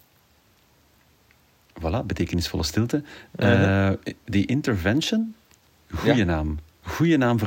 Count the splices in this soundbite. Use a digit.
1